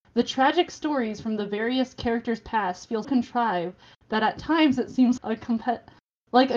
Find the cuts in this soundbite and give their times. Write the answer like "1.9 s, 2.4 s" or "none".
3.0 s, 5.2 s